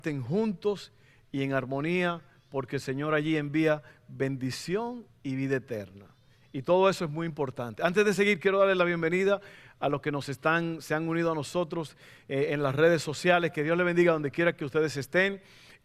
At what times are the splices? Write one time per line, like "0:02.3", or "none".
none